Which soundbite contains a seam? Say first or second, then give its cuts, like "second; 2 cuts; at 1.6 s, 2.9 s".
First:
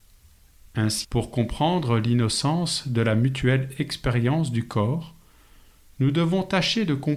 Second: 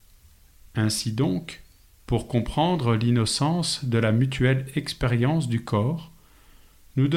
first; 1 cut; at 1.0 s